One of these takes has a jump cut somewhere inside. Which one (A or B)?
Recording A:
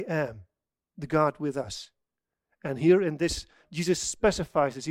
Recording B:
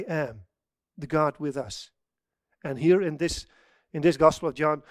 A